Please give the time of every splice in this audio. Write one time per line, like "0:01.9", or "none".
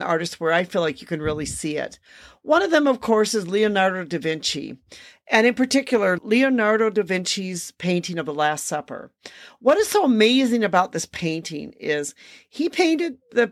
none